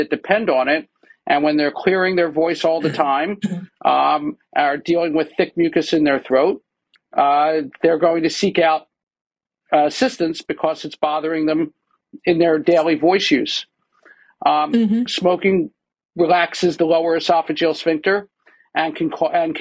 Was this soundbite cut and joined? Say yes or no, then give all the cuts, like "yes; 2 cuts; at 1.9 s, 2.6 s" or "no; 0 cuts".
yes; 1 cut; at 15.1 s